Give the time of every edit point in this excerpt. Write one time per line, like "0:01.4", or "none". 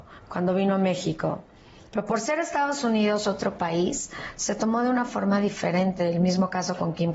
0:01.9